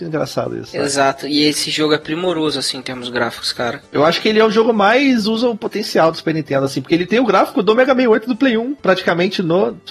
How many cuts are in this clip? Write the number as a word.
zero